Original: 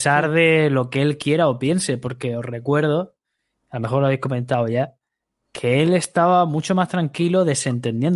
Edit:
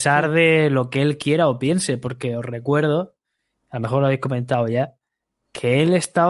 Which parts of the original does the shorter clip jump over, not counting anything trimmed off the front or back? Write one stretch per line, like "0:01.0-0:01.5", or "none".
none